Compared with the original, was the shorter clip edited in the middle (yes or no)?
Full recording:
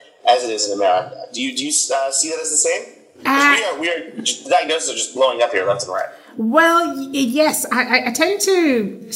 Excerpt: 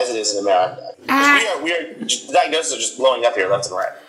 yes